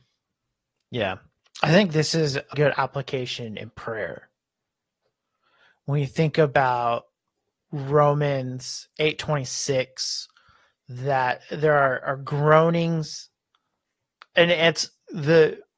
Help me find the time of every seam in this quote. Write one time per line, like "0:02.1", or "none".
0:02.5